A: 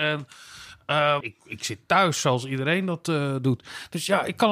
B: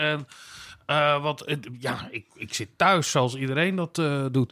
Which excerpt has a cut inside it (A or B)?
A